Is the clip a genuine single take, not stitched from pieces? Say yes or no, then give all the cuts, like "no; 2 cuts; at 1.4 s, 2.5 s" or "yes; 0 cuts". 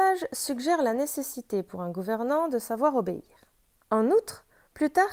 no; 1 cut; at 3.8 s